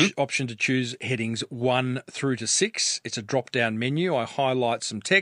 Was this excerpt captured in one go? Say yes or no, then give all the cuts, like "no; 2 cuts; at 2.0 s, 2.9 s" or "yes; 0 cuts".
yes; 0 cuts